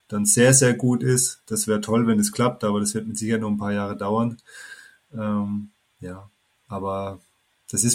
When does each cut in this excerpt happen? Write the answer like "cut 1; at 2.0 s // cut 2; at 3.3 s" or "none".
none